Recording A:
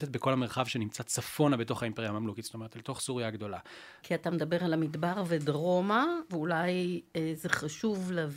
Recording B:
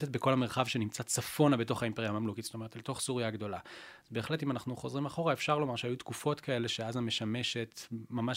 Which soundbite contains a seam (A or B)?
A